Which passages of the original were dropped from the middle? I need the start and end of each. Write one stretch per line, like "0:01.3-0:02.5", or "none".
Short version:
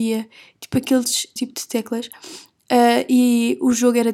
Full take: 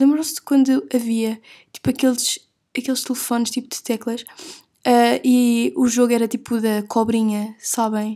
0:02.5-0:03.5